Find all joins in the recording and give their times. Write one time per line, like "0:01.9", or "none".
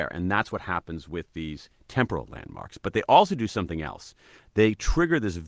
none